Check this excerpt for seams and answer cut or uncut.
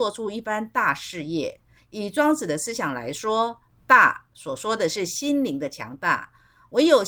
cut